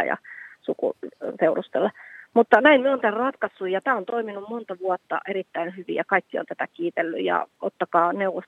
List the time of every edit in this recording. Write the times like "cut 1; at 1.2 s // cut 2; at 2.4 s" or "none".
none

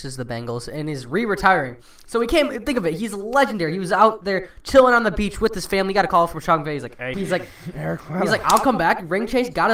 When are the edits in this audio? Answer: cut 1; at 7.1 s

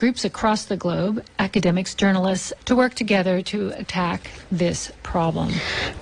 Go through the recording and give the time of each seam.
cut 1; at 2.6 s

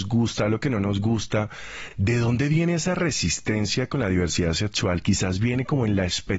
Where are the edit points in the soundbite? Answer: none

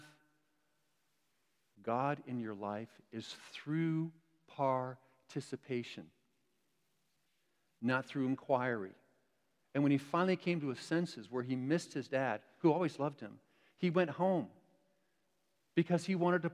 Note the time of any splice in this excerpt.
cut 1; at 9.6 s

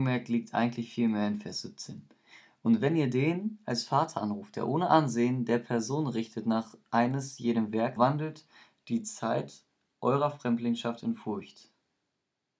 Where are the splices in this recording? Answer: cut 1; at 8.0 s

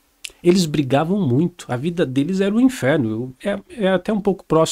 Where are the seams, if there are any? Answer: cut 1; at 3.4 s

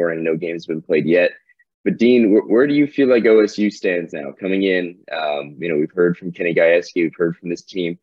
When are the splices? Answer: none

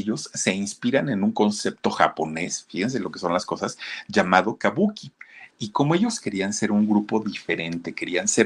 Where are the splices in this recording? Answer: cut 1; at 5.5 s

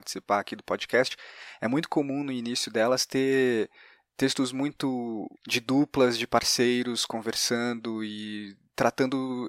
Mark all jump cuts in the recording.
cut 1; at 5.3 s

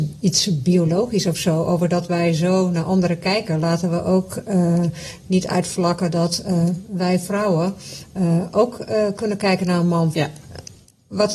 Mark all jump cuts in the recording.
cut 1; at 10.1 s

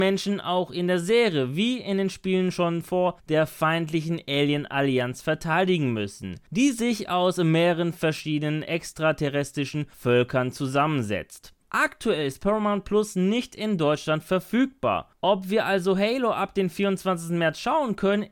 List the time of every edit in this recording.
cut 1; at 11.6 s

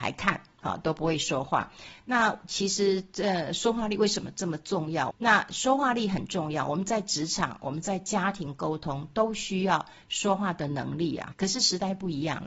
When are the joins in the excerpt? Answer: cut 1; at 5.1 s // cut 2; at 11.3 s

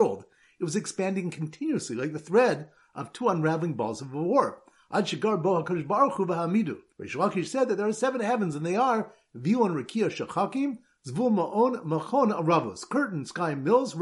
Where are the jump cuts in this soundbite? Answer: cut 1; at 6.9 s

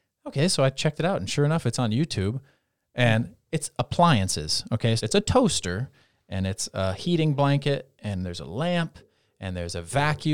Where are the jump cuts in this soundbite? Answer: cut 1; at 5.0 s

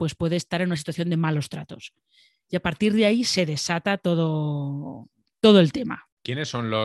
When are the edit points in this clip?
none

